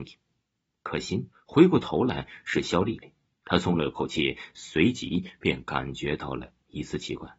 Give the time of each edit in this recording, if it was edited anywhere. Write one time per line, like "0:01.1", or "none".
0:01.3